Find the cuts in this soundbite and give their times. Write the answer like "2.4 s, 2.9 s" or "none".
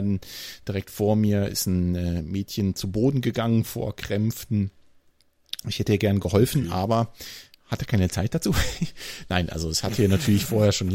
none